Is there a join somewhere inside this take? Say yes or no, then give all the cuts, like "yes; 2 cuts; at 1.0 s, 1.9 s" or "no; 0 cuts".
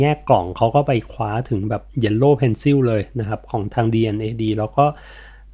yes; 1 cut; at 1.9 s